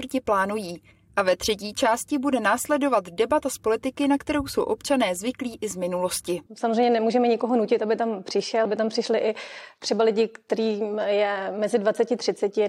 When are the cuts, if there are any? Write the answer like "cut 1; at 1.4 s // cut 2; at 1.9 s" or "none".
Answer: cut 1; at 6.5 s // cut 2; at 8.7 s